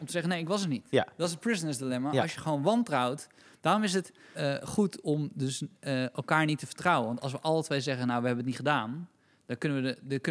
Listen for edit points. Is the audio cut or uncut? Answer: cut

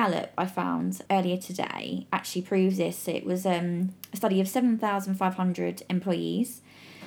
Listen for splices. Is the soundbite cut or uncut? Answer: cut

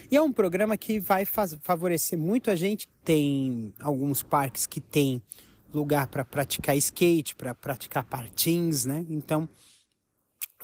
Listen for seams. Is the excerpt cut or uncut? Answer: cut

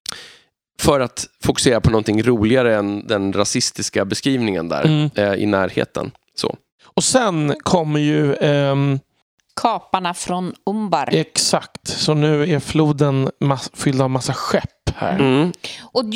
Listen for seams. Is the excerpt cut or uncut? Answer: uncut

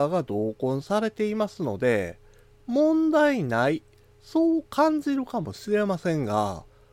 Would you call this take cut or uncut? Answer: uncut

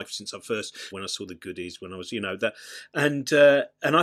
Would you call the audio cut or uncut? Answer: cut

